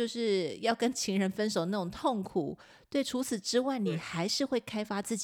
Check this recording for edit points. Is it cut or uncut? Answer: uncut